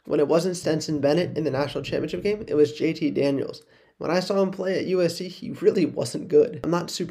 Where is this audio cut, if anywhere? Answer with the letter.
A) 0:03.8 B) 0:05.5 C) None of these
C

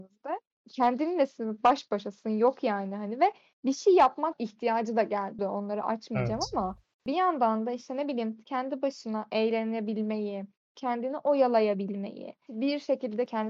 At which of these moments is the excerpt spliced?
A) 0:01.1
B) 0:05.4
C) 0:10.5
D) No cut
B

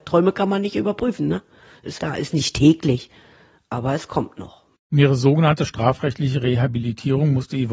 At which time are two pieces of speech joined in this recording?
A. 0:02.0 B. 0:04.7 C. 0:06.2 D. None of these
A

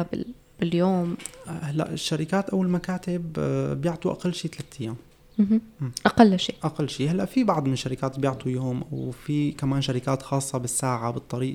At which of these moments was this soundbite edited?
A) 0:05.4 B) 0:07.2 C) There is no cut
C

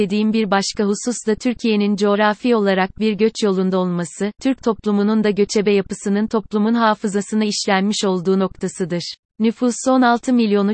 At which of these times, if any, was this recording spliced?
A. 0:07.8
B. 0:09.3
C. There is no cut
B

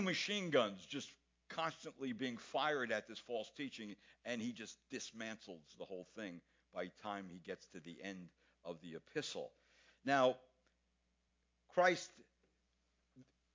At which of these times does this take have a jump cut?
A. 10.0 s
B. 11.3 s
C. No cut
C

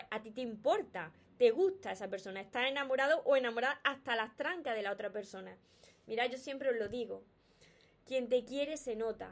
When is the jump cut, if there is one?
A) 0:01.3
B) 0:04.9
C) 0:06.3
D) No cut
D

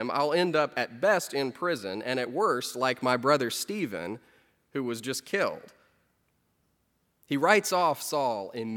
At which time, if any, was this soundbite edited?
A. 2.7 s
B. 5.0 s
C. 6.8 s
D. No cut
D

